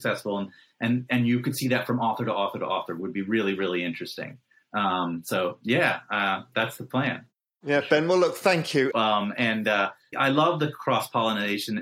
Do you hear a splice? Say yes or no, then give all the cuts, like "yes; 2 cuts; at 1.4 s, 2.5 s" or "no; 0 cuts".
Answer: yes; 2 cuts; at 8.9 s, 10.1 s